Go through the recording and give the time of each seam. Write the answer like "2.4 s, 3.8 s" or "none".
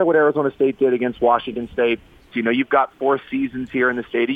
2.3 s